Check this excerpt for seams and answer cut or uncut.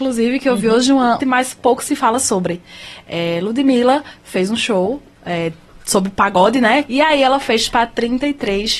cut